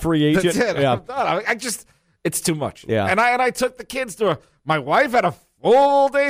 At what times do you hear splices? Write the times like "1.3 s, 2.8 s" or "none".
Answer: none